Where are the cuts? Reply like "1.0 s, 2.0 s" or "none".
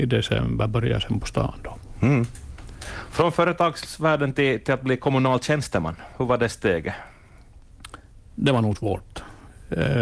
none